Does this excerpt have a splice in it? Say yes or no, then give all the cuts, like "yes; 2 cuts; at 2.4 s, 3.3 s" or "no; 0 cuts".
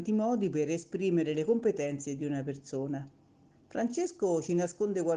yes; 1 cut; at 3.5 s